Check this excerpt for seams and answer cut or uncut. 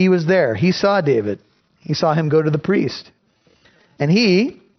uncut